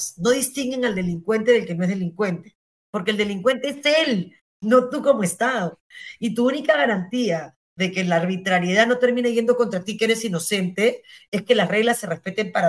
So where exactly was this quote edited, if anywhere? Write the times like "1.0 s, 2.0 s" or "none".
none